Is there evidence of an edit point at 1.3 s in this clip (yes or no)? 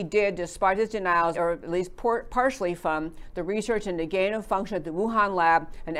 yes